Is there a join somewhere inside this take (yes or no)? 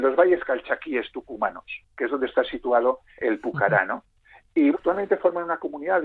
yes